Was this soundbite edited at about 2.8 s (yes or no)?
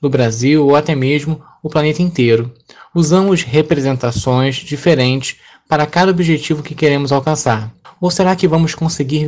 no